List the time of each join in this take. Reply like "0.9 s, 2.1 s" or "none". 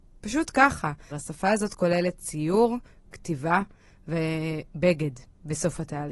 1.1 s